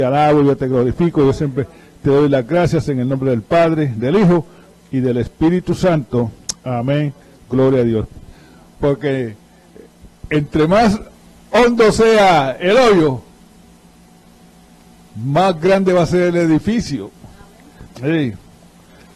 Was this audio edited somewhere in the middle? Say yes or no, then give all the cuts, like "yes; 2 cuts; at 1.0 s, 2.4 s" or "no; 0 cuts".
yes; 2 cuts; at 8.1 s, 17.9 s